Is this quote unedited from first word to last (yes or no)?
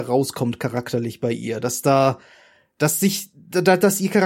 yes